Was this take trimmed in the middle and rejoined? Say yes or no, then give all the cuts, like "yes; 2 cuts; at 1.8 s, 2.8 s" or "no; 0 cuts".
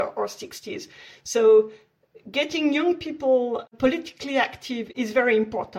no; 0 cuts